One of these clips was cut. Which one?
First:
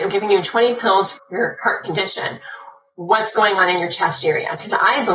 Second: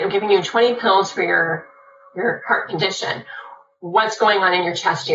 first; 1 cut; at 1.2 s

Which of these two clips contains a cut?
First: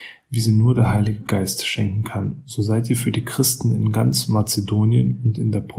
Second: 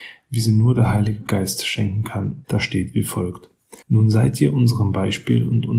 second; 2 cuts; at 2.4 s, 3.8 s

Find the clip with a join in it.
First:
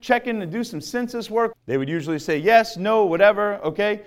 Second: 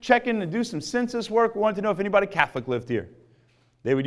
first; 1 cut; at 1.5 s

